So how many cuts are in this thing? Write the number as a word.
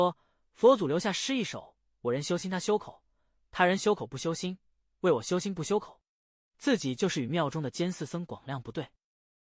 zero